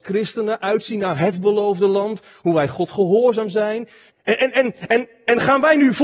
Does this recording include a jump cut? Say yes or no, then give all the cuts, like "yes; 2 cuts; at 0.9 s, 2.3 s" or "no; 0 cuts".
yes; 1 cut; at 4.1 s